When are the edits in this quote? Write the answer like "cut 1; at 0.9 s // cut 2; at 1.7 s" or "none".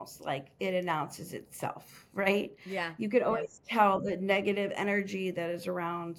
none